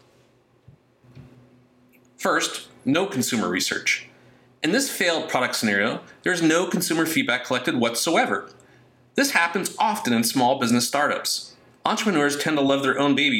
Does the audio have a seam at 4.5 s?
no; 0 cuts

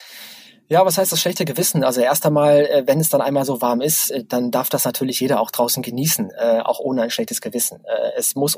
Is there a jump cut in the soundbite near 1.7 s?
no; 0 cuts

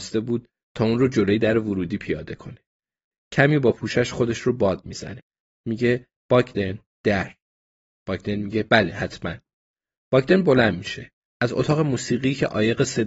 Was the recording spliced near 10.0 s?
no; 3 cuts; at 3.1 s, 5.5 s, 11.2 s

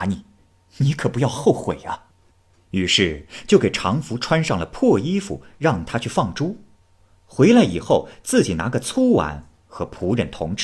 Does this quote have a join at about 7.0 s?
no; 0 cuts

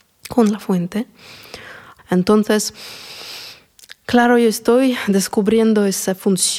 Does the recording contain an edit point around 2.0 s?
yes; 1 cut; at 2.0 s

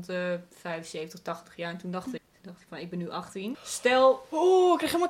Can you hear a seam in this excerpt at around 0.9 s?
no; 2 cuts; at 2.2 s, 3.5 s

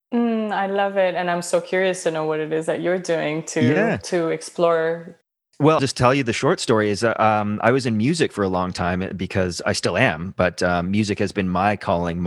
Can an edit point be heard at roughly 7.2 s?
no; 1 cut; at 5.8 s

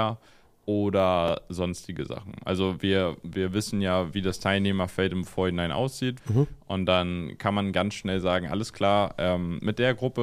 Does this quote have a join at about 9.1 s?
no; 1 cut; at 6.2 s

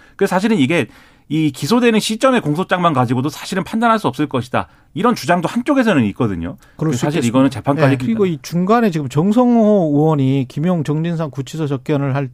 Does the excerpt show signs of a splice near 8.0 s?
yes; 1 cut; at 8.0 s

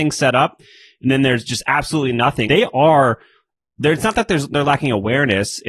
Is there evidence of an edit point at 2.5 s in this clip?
yes; 1 cut; at 2.5 s

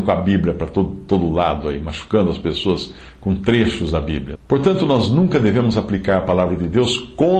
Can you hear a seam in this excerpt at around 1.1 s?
no; 1 cut; at 4.4 s

